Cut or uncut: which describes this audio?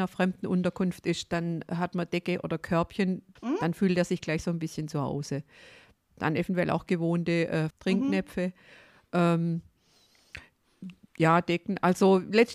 cut